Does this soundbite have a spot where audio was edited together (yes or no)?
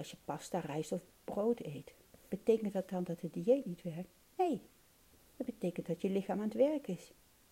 no